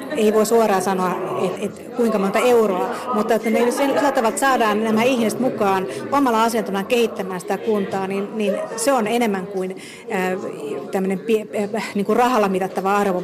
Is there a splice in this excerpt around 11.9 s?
no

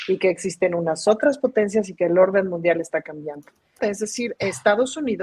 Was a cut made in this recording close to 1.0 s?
no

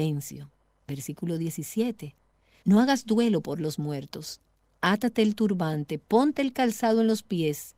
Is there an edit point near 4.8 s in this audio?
no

